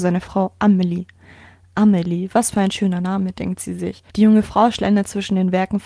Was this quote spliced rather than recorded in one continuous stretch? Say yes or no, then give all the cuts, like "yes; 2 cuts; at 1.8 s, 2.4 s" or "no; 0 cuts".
yes; 1 cut; at 4.1 s